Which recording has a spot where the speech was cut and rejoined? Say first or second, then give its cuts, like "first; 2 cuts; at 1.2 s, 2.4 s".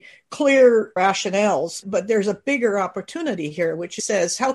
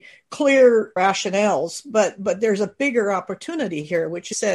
first; 1 cut; at 1.8 s